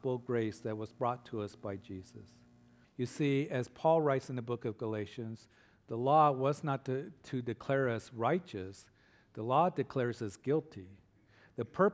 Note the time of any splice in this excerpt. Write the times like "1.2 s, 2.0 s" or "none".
2.8 s